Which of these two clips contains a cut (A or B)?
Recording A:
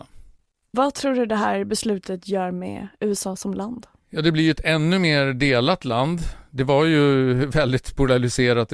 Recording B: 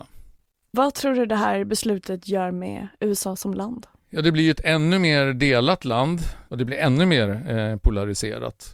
B